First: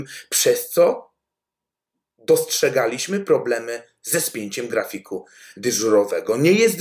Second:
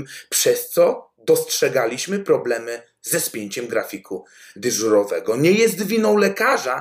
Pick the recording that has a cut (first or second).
second